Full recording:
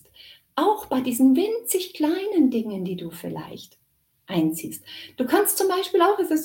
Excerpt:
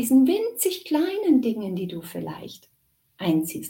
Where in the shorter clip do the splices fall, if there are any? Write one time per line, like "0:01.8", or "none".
none